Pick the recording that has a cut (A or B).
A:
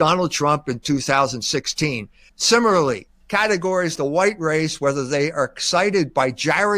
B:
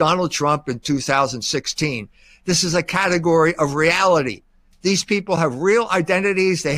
A